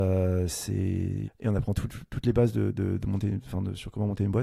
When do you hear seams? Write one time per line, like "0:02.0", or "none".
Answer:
0:01.3